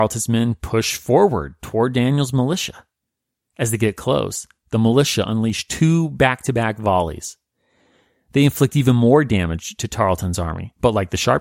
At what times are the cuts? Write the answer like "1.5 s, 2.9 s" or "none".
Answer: none